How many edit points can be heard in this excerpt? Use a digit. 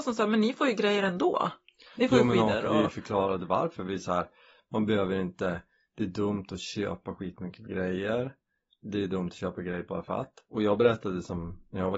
0